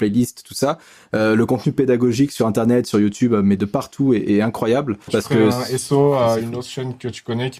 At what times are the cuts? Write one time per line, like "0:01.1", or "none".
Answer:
0:05.1

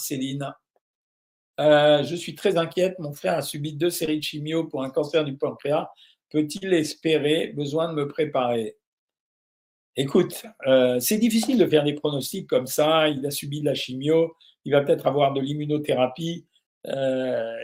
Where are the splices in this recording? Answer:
0:16.7

